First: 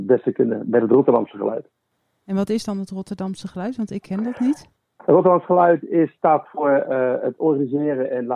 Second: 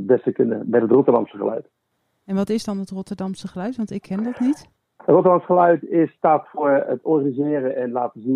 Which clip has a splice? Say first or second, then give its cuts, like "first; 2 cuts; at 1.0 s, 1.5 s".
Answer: second; 1 cut; at 6.9 s